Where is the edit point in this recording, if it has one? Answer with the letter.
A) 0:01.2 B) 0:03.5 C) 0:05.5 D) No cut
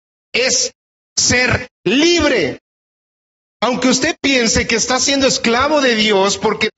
B